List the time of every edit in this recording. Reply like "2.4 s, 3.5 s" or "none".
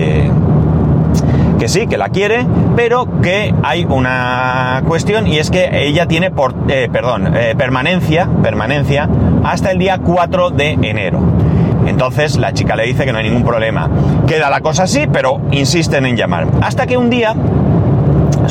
14.2 s